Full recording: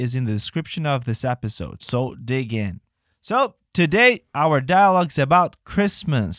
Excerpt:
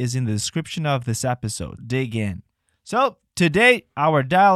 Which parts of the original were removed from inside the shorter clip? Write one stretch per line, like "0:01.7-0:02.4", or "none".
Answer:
0:01.8-0:02.2